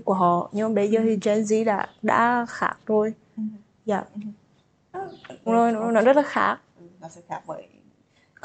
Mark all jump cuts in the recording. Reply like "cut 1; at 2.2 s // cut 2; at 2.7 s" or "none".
cut 1; at 5.5 s